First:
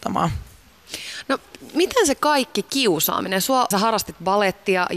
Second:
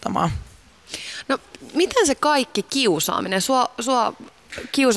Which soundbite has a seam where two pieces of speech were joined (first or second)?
first